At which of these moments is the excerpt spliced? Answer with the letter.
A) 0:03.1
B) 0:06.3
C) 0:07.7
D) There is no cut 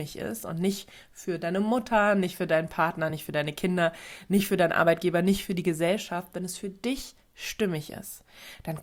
D